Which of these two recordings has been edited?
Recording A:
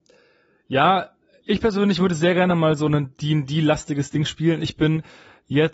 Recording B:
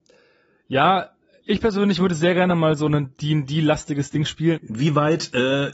B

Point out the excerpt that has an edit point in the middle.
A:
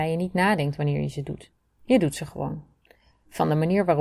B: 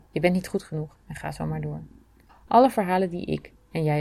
B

